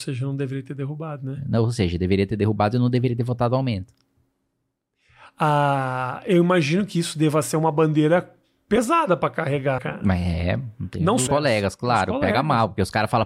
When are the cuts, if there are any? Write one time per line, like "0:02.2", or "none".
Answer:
0:09.8
0:11.3